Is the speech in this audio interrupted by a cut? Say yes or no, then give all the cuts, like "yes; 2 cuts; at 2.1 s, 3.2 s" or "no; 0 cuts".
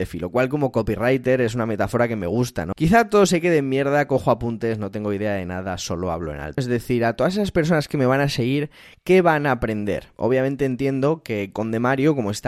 yes; 2 cuts; at 2.7 s, 6.6 s